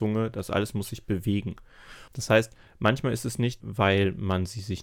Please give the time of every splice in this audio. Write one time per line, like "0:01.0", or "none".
0:02.1
0:03.6

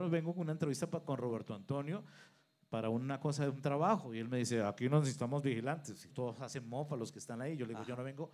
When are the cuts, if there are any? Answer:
0:06.1

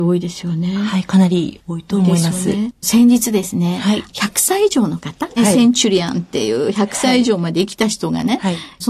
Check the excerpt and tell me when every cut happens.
0:02.8
0:05.4

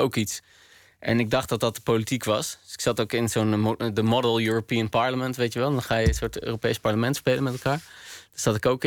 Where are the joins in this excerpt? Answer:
none

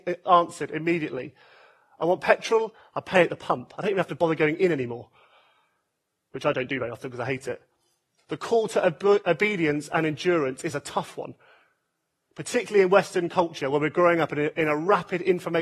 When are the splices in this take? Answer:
0:08.2

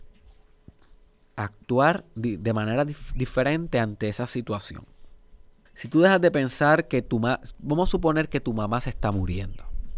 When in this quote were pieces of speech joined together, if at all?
0:05.7

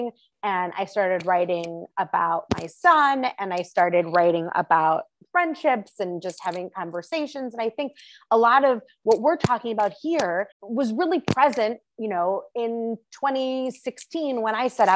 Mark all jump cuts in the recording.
0:10.5

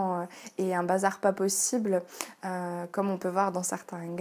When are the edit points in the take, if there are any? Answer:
none

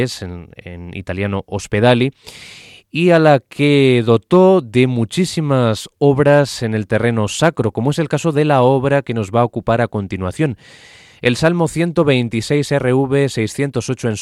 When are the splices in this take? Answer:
none

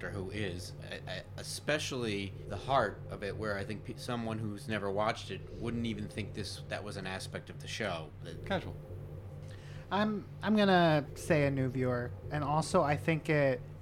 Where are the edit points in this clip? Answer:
0:08.4
0:12.2

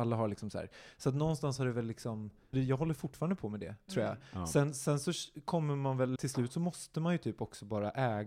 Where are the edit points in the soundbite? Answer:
0:02.5
0:06.2

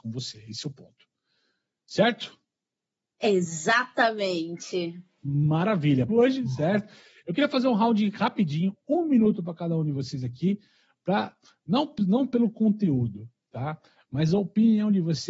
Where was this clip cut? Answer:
0:06.1

